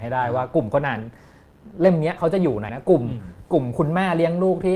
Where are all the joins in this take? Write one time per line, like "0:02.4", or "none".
0:02.7